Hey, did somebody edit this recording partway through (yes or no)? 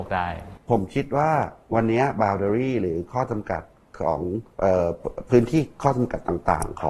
yes